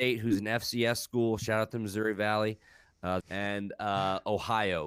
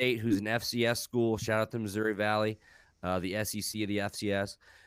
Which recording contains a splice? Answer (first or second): first